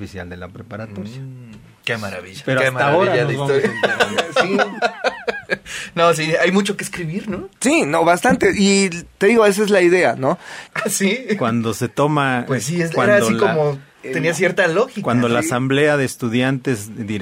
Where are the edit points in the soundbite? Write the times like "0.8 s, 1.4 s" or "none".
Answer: 10.7 s